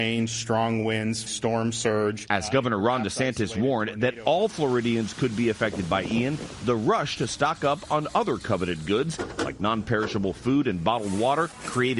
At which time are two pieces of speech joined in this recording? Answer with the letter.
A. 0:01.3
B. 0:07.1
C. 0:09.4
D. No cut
A